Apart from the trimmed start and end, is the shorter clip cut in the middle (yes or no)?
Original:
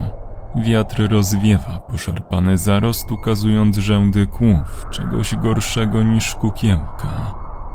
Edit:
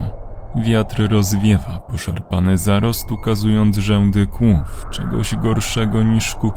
no